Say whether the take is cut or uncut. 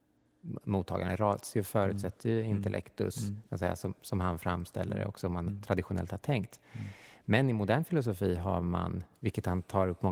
cut